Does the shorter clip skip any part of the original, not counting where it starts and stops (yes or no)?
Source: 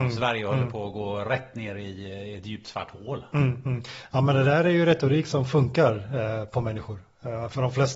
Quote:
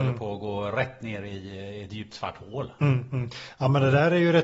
no